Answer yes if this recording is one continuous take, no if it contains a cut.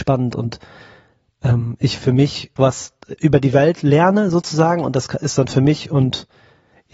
no